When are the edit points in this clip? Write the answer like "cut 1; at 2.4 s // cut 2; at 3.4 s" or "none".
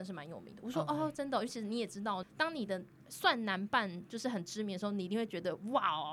cut 1; at 2.2 s

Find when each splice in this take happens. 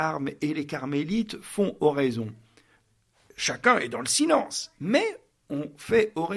none

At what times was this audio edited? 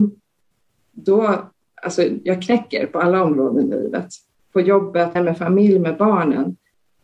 cut 1; at 5.2 s

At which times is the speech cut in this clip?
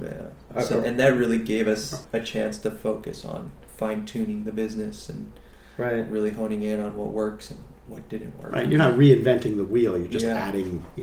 none

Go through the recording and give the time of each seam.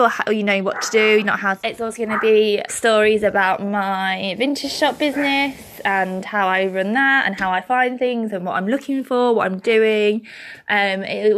cut 1; at 1.6 s // cut 2; at 2.7 s

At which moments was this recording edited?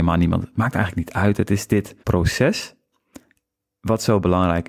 cut 1; at 2.0 s

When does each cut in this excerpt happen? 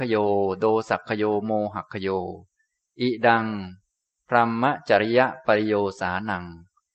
none

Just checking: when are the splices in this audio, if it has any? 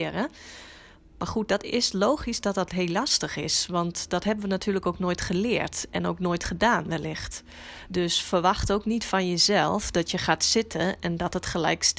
none

